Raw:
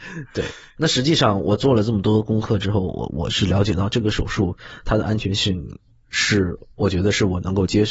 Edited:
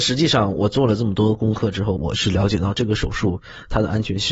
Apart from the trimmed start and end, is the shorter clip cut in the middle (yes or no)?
yes